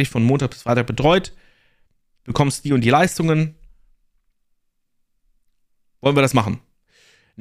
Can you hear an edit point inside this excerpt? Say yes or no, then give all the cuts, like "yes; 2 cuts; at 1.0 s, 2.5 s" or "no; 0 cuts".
no; 0 cuts